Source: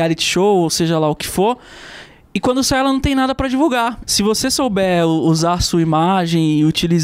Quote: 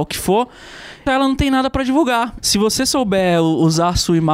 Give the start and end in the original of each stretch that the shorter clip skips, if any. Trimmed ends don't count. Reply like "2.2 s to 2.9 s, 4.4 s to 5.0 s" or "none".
2.2 s to 2.7 s